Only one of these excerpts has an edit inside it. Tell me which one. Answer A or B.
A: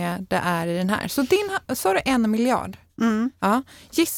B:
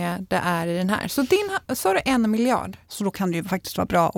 B